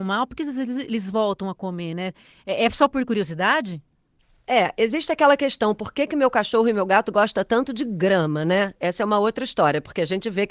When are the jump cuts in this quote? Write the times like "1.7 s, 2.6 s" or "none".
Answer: none